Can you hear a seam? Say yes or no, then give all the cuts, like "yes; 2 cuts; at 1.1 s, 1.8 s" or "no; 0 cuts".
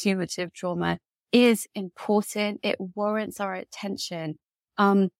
no; 0 cuts